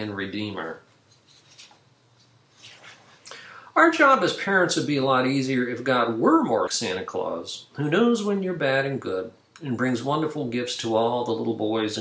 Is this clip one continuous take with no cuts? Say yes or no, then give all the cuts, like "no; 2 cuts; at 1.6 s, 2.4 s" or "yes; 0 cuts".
no; 1 cut; at 6.7 s